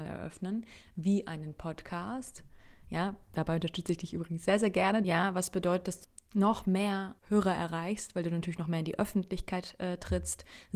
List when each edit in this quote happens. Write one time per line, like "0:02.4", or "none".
0:05.0
0:07.2

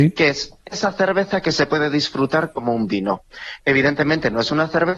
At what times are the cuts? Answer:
none

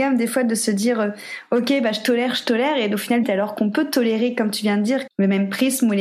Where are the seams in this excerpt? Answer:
0:03.2
0:05.1

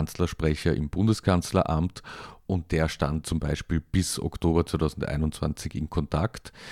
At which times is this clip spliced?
0:03.2

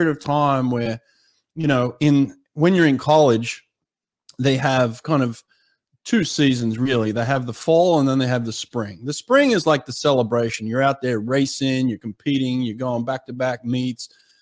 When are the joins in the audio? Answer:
none

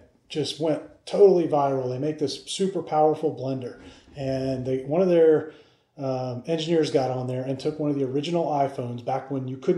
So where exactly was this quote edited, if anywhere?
none

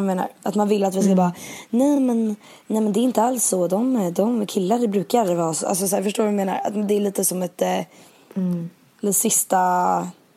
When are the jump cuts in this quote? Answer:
none

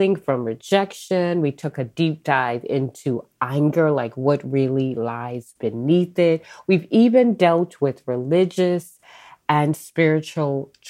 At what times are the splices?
none

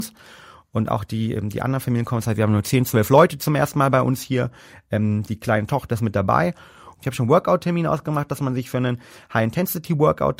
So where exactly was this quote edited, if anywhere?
0:06.9

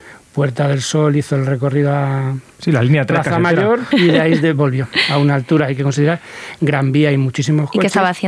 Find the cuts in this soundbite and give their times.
0:03.9

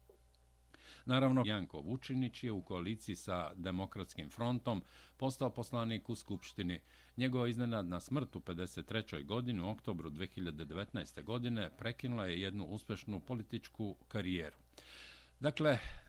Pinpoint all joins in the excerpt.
0:01.4

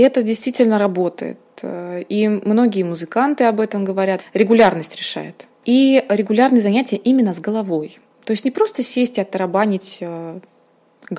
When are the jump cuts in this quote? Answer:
0:04.2
0:05.6

